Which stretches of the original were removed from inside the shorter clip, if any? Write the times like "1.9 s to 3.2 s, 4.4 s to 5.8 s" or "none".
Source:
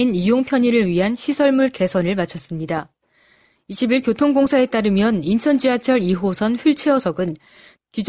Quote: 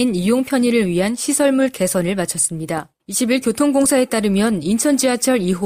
3.0 s to 3.6 s